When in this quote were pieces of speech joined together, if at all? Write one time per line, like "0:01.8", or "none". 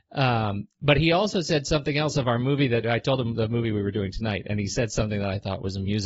none

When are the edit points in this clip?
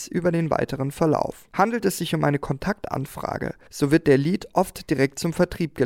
none

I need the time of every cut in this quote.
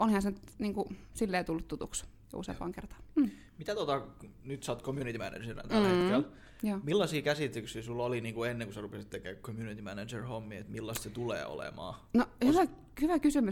none

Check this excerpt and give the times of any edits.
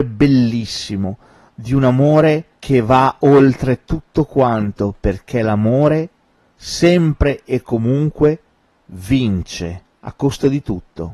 none

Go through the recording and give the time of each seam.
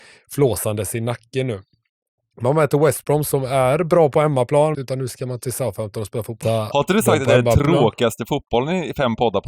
0:04.7
0:06.4

